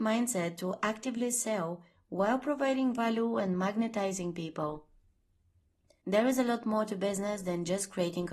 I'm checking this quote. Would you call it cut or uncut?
uncut